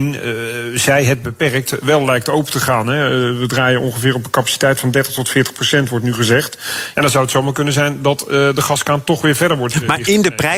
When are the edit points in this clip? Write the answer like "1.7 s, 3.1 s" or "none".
6.9 s